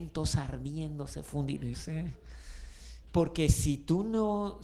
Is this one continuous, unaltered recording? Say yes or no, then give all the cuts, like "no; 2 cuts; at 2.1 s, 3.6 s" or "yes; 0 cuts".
no; 2 cuts; at 1.7 s, 3.0 s